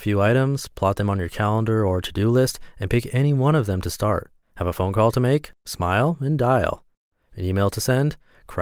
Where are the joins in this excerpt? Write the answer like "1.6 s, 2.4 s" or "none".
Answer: 4.4 s